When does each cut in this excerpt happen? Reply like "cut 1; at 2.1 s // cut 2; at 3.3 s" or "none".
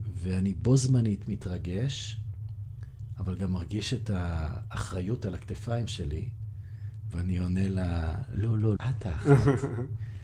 cut 1; at 8.8 s